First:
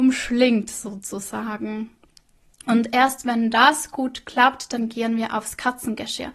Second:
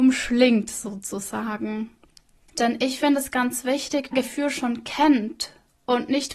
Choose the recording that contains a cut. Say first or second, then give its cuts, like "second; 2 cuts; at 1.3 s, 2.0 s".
second; 2 cuts; at 2.5 s, 4.1 s